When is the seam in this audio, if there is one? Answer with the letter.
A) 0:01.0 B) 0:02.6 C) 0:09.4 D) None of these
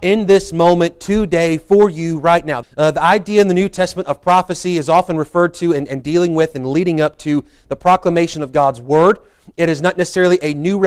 B